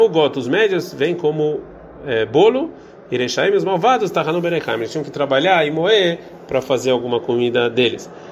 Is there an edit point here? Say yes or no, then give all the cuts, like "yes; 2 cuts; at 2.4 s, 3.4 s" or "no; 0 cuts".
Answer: no; 0 cuts